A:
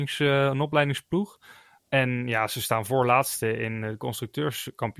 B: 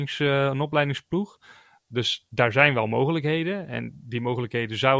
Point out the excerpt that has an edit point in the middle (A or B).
A